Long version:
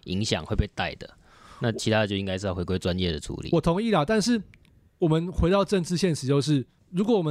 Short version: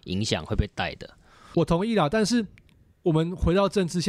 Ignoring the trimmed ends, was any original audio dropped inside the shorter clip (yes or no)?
yes